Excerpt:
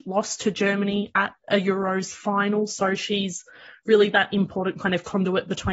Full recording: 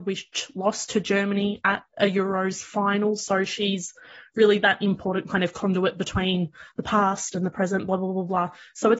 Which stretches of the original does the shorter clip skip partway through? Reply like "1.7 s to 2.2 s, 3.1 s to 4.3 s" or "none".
none